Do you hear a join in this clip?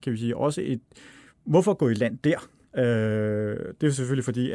no; 0 cuts

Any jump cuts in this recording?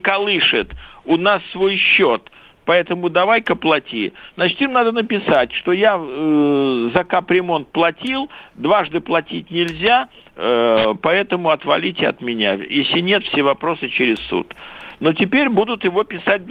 no; 0 cuts

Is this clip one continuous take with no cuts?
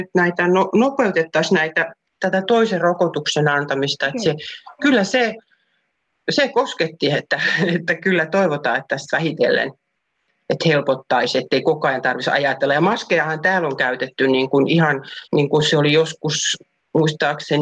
no; 1 cut; at 15.3 s

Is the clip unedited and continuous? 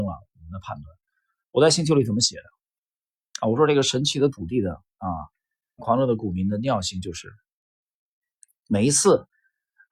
no; 1 cut; at 5.8 s

